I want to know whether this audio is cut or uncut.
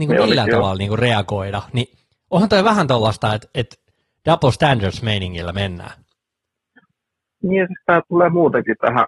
uncut